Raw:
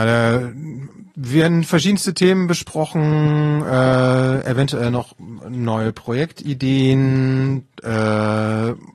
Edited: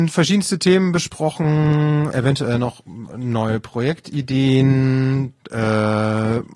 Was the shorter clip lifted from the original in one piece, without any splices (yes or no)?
no